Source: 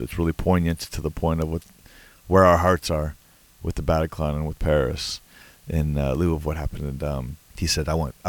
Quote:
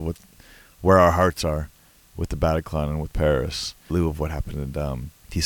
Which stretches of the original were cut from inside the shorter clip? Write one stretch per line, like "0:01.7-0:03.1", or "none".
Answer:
0:05.4-0:06.2